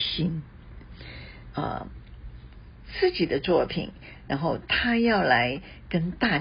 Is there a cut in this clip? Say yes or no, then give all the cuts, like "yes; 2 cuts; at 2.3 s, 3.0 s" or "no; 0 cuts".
yes; 1 cut; at 1.5 s